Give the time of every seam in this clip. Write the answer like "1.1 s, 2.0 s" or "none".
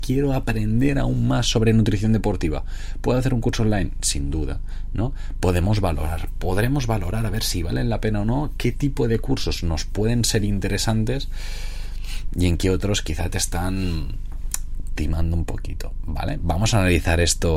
none